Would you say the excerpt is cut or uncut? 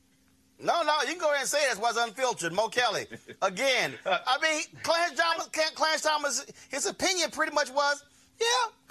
uncut